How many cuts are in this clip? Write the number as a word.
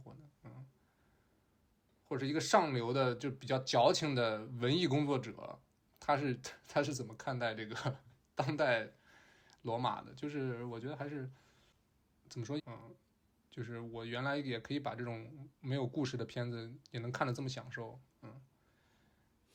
two